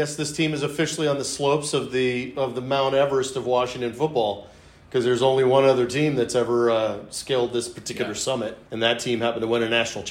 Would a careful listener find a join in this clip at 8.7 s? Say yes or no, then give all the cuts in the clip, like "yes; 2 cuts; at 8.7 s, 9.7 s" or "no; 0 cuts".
yes; 1 cut; at 8.7 s